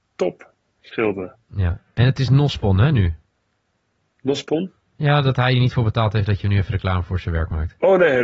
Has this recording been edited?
no; 0 cuts

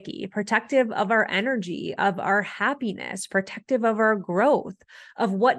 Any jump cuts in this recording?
no; 0 cuts

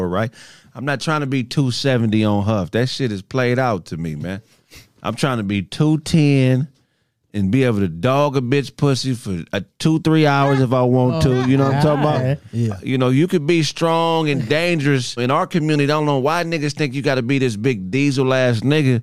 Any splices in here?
yes; 1 cut; at 15.2 s

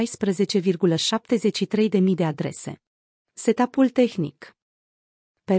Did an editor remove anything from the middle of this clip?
yes; 1 cut; at 3.2 s

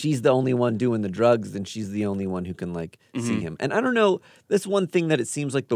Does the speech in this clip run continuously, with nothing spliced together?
yes; 0 cuts

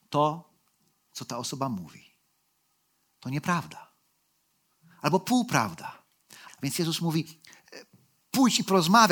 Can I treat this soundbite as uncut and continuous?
no; 1 cut; at 6.5 s

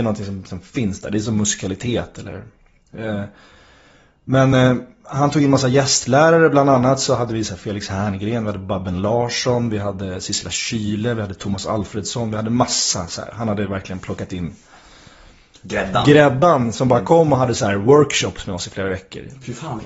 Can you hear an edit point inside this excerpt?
no; 0 cuts

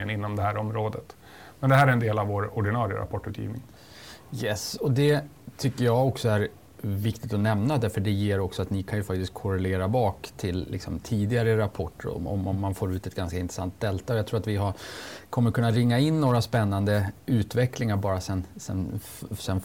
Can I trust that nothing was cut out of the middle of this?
yes; 0 cuts

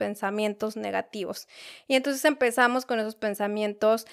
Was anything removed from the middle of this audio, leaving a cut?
no; 0 cuts

